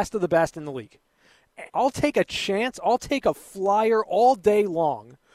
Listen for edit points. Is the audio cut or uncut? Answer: cut